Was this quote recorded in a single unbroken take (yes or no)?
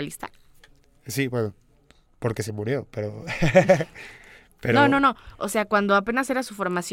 yes